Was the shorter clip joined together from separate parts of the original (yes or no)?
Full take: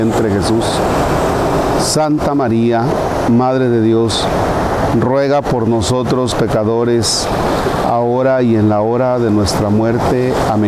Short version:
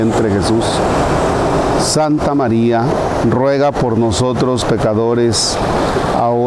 yes